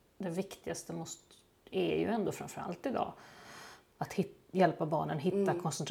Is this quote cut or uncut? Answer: uncut